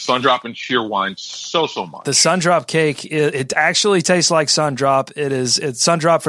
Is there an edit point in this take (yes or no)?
no